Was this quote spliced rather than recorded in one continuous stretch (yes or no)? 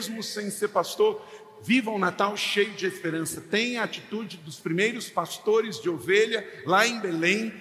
no